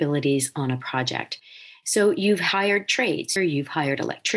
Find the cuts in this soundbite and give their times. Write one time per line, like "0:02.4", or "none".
0:03.4